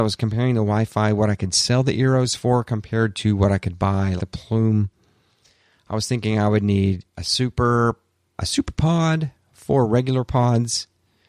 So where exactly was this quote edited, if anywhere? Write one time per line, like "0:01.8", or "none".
0:04.2
0:08.4